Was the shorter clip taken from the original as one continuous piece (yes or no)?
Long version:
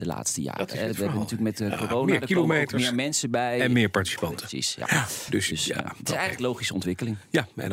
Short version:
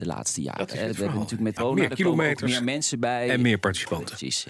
no